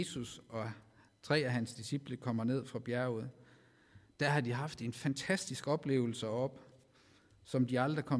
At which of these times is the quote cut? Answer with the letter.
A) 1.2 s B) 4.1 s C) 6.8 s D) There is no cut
D